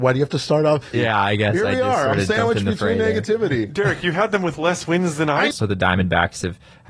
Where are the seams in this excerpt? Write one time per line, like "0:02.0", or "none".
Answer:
0:00.9
0:05.5